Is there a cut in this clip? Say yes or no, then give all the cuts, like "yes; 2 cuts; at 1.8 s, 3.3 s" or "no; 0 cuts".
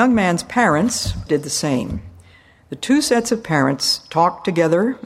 yes; 1 cut; at 1.3 s